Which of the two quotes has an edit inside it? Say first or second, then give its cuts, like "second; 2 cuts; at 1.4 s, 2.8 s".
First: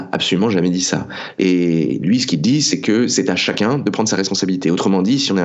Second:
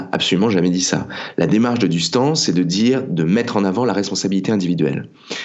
first; 1 cut; at 1.3 s